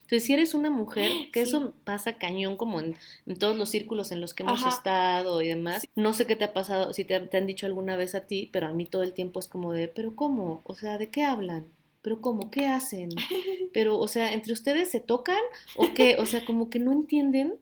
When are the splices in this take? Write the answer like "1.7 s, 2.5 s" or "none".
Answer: 5.8 s